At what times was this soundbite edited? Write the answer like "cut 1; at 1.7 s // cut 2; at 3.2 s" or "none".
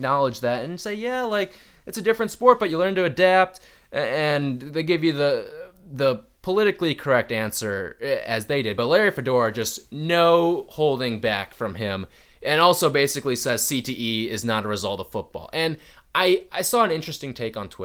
none